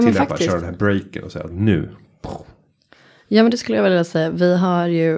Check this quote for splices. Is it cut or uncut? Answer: uncut